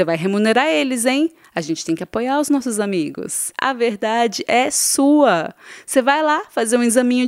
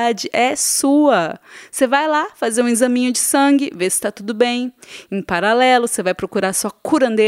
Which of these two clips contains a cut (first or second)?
first